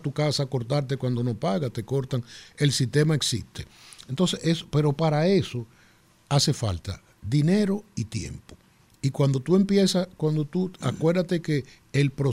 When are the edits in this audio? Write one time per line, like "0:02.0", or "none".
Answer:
none